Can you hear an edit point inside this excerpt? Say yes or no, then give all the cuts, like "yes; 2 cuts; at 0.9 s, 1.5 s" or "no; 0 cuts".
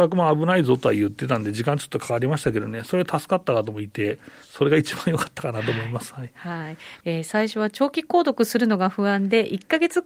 yes; 1 cut; at 7.0 s